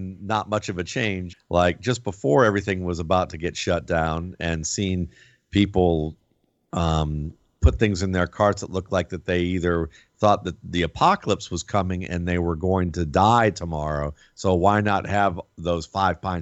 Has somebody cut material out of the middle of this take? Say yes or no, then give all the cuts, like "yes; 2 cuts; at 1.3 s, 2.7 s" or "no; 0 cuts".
yes; 1 cut; at 1.3 s